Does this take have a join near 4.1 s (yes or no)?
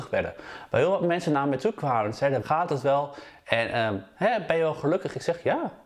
no